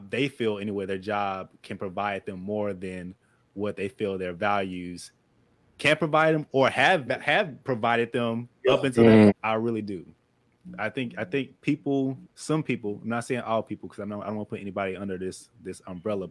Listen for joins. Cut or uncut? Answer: cut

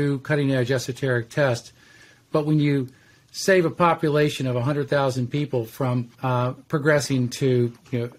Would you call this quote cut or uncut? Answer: cut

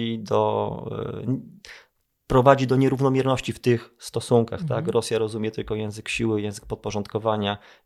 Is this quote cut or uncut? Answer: uncut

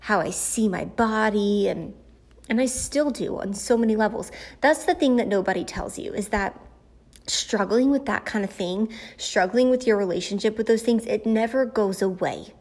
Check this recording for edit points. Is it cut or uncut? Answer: uncut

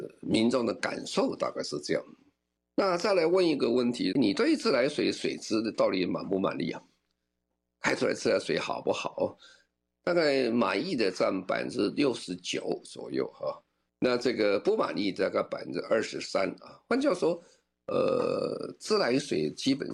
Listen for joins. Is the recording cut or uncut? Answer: cut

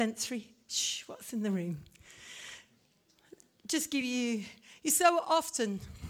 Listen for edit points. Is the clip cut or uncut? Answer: uncut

